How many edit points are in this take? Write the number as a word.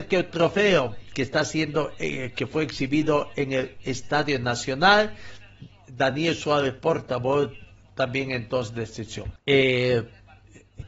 one